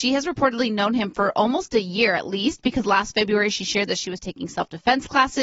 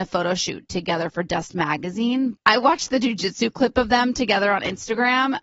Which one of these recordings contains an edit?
second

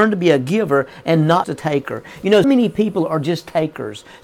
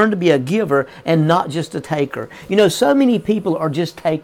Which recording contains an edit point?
first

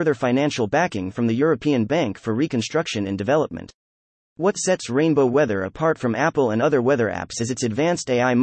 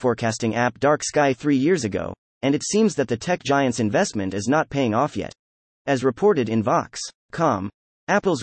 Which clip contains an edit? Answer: second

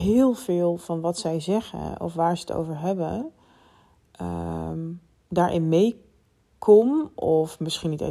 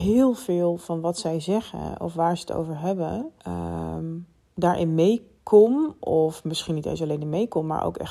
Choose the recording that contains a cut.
second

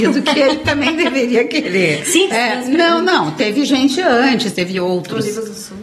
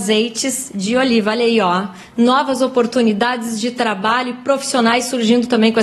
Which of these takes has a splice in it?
first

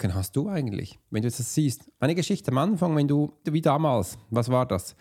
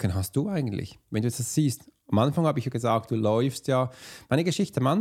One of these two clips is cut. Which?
first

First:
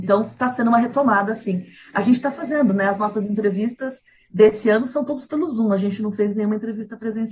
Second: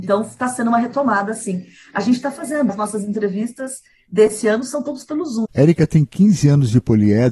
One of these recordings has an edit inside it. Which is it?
second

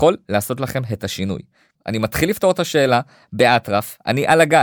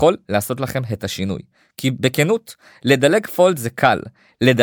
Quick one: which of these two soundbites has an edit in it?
first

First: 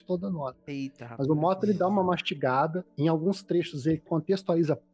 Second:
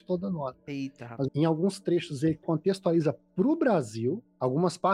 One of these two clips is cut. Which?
second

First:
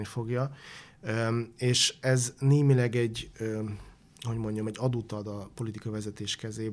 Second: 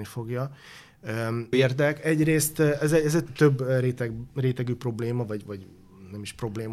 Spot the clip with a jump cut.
second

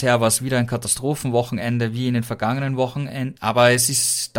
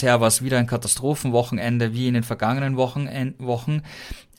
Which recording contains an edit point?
first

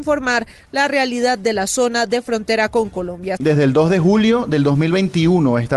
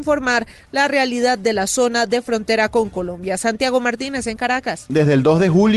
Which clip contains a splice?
first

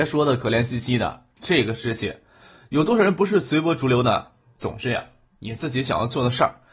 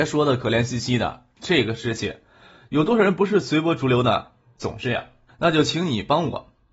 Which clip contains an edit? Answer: second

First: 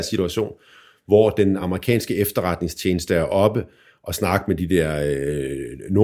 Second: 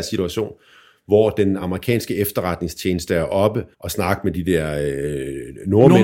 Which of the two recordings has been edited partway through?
second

